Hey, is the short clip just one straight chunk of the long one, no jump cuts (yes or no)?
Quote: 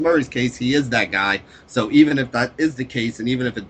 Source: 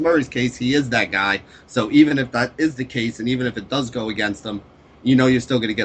yes